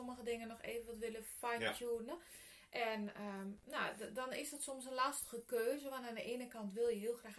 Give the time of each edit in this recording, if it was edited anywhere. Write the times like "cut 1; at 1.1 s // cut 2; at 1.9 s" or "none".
none